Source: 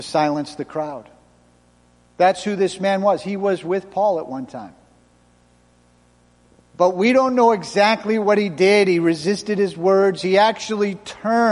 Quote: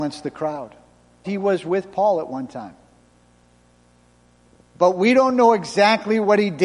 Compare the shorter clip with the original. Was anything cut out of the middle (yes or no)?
yes